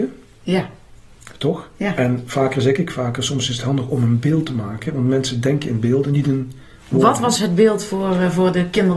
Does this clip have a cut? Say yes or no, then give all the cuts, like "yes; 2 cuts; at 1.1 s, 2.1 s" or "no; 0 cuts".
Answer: no; 0 cuts